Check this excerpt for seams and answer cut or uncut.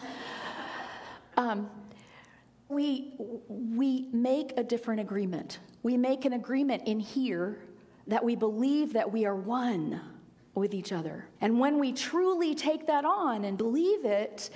cut